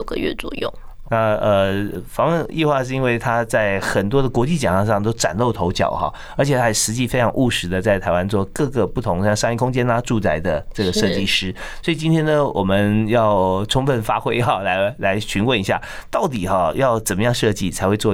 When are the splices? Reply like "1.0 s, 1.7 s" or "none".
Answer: 1.0 s

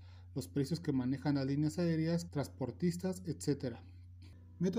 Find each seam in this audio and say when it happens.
2.3 s

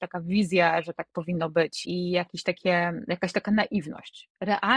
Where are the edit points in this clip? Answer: 1.8 s

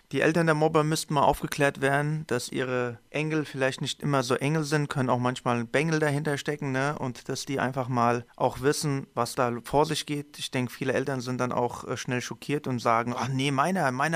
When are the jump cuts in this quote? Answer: none

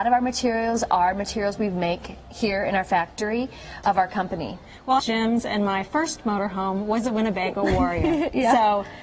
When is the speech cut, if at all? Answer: 3.8 s, 5.0 s

